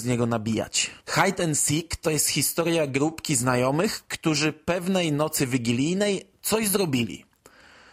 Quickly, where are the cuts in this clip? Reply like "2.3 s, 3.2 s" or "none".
1.0 s